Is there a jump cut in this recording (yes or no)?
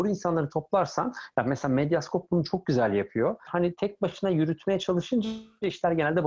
yes